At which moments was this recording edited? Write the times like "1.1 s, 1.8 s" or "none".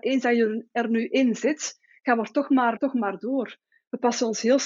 2.8 s

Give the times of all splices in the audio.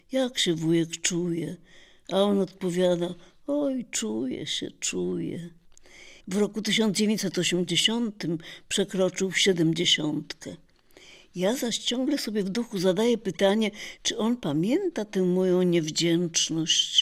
6.2 s

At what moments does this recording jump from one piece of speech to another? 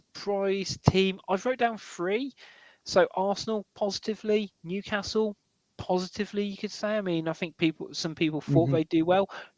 none

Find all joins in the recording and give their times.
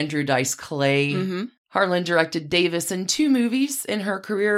1.6 s

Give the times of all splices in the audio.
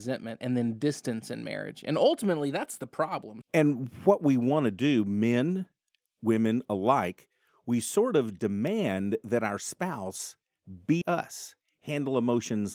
3.4 s, 11.0 s

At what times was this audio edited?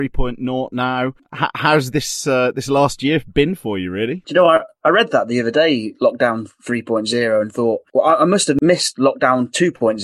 none

